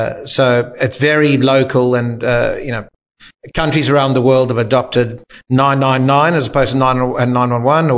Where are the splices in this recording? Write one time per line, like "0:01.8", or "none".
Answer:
none